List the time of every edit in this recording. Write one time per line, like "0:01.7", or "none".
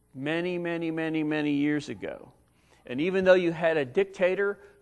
none